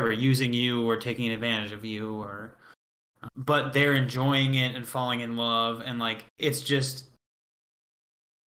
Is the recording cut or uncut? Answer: cut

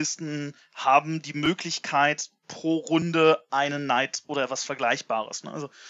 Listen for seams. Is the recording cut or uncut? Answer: uncut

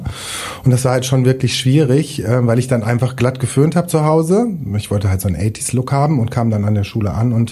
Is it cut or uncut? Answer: uncut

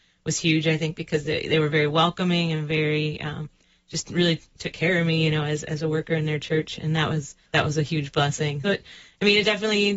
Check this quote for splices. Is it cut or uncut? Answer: cut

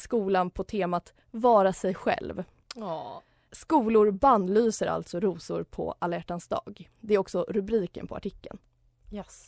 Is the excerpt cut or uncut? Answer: uncut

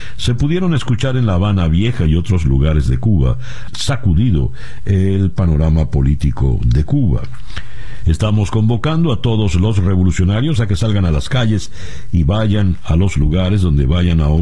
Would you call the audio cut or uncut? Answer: cut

